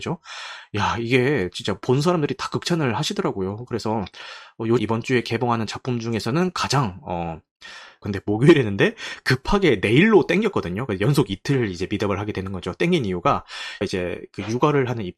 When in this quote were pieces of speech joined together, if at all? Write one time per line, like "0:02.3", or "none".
0:04.8
0:08.0